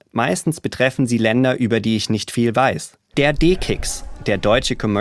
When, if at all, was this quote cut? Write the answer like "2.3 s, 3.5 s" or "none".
3.1 s